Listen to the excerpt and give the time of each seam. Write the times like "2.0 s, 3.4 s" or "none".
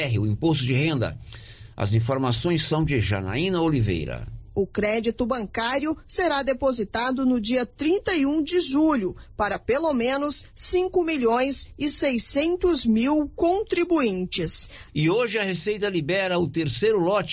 4.5 s, 14.9 s